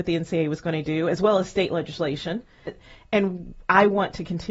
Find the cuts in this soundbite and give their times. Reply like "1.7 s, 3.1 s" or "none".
2.7 s